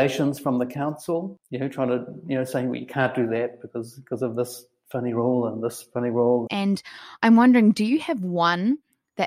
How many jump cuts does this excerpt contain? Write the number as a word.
one